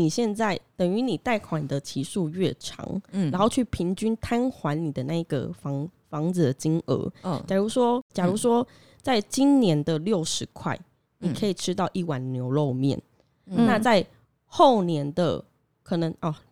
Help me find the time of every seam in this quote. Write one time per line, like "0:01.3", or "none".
0:08.1